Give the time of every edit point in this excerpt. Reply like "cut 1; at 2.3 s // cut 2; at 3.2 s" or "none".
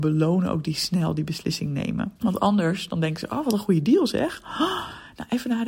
cut 1; at 2.2 s